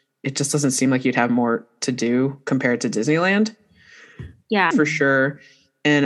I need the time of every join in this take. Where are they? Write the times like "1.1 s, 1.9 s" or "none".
4.7 s